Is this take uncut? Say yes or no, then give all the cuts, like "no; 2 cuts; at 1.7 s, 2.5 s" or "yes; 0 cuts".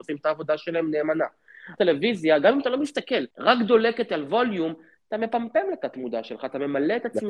no; 2 cuts; at 1.8 s, 3.3 s